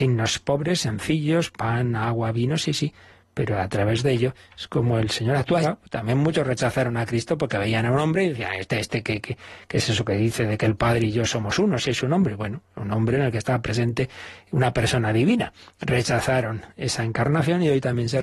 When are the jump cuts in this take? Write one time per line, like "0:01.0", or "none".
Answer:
0:05.6